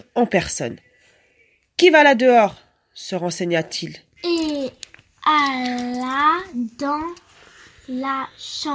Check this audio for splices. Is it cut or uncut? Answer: cut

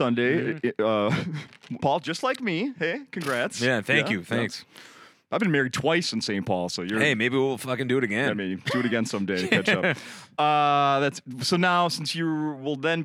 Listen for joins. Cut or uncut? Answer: cut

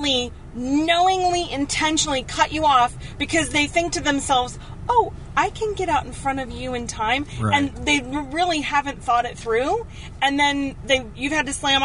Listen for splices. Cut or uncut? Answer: uncut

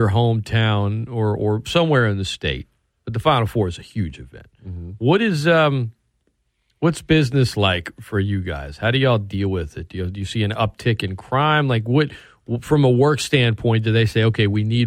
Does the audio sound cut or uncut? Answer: uncut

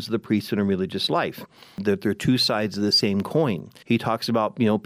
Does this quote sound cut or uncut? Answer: cut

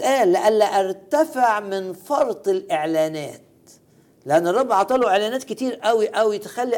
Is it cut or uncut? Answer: uncut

